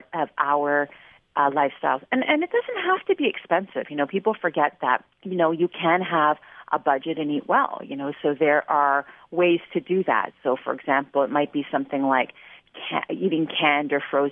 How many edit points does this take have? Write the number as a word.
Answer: one